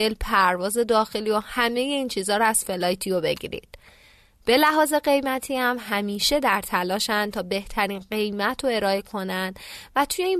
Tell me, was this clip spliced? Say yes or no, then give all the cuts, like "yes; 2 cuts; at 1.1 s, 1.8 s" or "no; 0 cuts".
no; 0 cuts